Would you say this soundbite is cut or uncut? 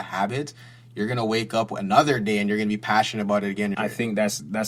cut